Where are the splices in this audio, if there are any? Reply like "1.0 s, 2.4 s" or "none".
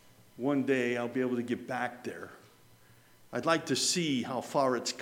none